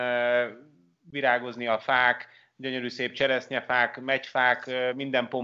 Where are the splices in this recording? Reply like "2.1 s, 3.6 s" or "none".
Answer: none